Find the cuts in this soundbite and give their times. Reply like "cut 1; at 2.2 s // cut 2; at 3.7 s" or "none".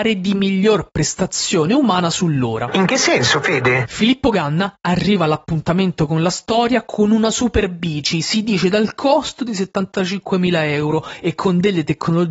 none